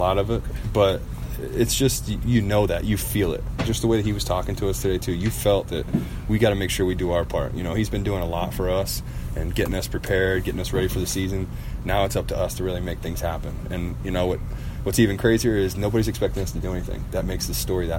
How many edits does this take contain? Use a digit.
0